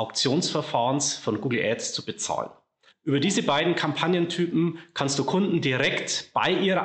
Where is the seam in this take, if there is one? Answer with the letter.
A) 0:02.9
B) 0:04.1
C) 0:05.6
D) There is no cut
A